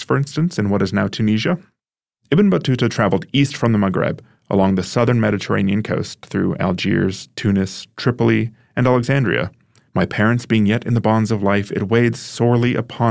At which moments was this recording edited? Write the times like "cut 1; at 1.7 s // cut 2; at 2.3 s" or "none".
cut 1; at 2.2 s // cut 2; at 9.9 s